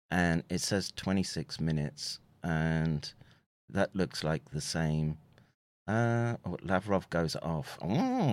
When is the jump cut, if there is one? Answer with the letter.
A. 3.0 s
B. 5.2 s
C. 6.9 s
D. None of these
D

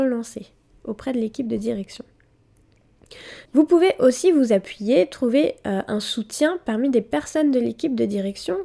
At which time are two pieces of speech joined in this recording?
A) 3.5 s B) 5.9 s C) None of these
A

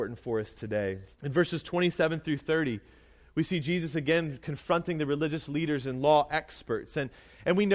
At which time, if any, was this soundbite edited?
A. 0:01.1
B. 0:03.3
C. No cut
A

